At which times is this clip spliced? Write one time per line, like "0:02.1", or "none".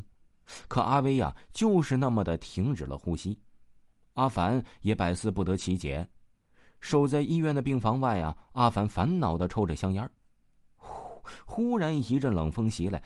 none